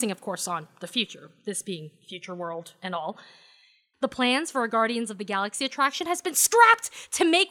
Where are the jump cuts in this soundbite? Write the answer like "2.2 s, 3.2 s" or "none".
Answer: 3.9 s